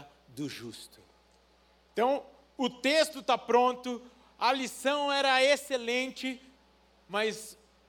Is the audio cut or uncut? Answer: cut